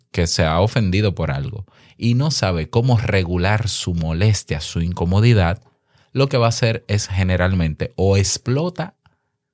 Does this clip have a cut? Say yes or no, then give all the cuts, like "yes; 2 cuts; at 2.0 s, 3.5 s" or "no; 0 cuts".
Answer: no; 0 cuts